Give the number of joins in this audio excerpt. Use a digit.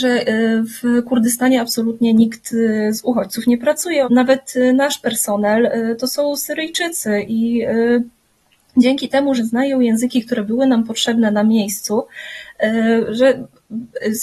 2